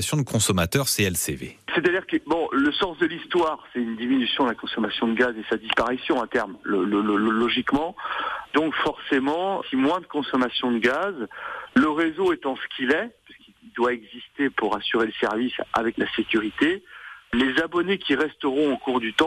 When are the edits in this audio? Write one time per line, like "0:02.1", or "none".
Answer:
0:09.6